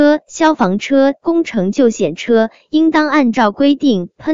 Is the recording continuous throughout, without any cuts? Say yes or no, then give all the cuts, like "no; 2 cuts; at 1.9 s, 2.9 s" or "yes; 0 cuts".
no; 1 cut; at 1.2 s